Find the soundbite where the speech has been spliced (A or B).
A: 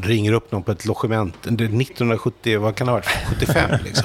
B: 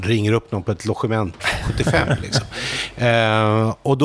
B